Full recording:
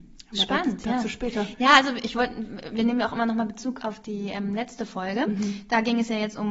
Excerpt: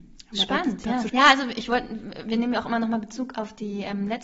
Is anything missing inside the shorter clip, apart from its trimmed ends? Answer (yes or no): yes